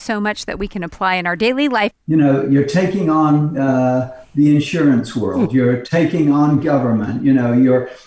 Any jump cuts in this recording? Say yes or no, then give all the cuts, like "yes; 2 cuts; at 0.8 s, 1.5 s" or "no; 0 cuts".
yes; 1 cut; at 1.9 s